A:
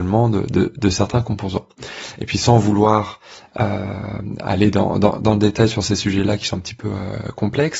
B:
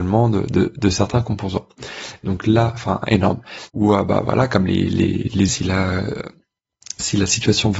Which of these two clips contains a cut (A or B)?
B